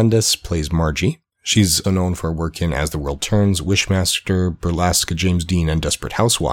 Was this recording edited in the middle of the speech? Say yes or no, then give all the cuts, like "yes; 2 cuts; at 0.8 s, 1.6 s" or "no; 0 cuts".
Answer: yes; 1 cut; at 1.8 s